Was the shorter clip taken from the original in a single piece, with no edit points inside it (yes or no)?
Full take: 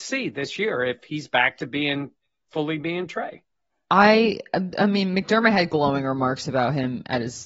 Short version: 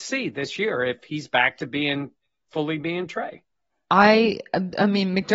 yes